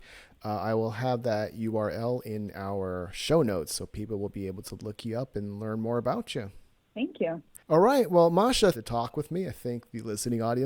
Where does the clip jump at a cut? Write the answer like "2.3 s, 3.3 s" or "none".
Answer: 7.6 s, 8.7 s